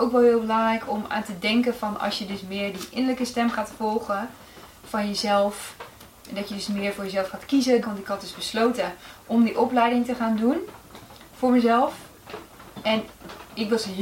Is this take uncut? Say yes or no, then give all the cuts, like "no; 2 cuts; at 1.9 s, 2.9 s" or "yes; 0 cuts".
no; 1 cut; at 7.8 s